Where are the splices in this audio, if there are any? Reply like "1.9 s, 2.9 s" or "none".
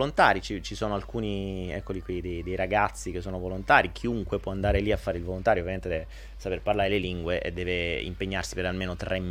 none